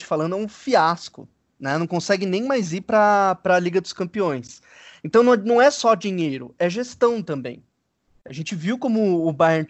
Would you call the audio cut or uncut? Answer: uncut